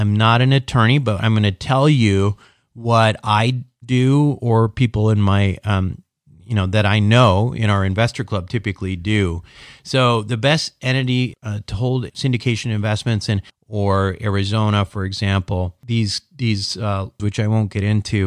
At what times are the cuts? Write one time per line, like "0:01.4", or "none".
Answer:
0:13.5
0:17.2